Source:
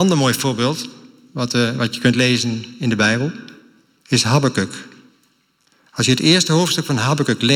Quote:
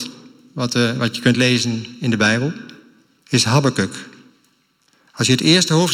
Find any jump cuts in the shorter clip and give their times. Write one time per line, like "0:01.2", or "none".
none